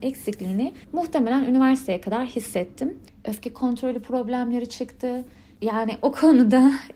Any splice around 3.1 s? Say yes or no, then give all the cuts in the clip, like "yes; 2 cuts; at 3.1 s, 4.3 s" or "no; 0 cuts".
yes; 2 cuts; at 3.1 s, 5.6 s